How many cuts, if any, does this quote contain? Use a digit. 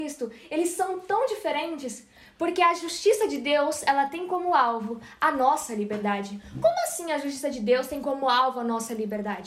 0